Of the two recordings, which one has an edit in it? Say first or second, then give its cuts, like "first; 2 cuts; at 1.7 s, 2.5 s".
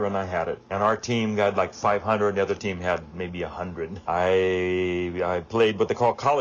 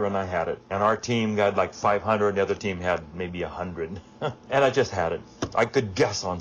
first; 1 cut; at 4.0 s